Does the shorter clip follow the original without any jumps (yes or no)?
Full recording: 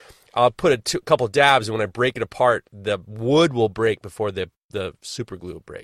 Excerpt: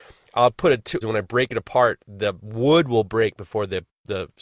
no